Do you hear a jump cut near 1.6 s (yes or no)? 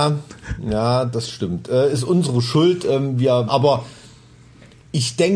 no